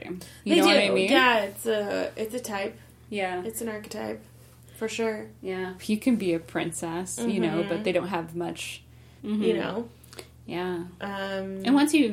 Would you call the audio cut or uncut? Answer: cut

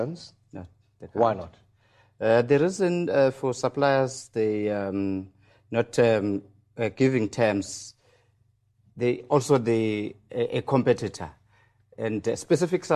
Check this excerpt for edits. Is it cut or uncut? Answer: uncut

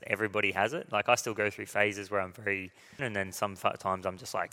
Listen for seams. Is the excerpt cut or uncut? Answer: cut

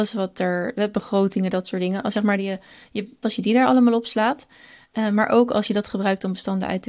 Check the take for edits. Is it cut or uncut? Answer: cut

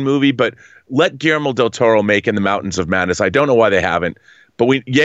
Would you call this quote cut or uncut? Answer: uncut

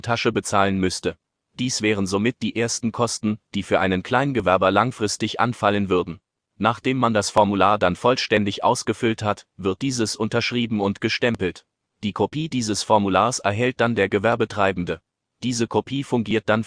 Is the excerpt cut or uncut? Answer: uncut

